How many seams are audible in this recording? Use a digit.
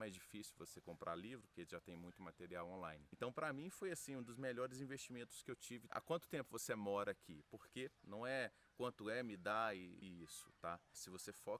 2